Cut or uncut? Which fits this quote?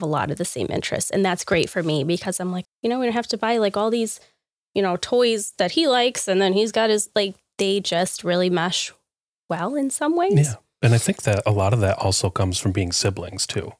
cut